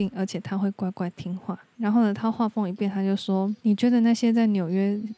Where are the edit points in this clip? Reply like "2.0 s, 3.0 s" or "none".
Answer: none